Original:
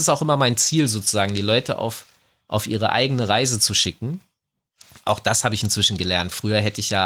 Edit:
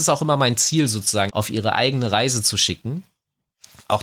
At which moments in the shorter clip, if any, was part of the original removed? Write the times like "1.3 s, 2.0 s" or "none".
1.3 s